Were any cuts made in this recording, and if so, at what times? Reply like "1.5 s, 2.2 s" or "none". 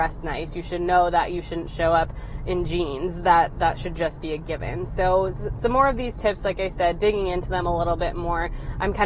none